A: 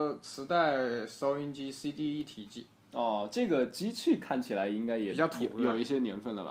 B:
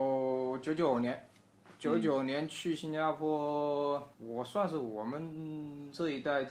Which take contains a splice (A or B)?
B